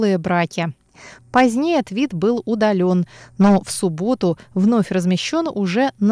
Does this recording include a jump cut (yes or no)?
yes